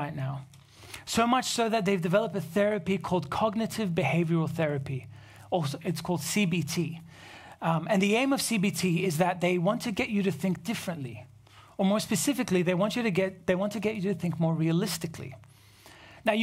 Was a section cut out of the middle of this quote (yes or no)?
no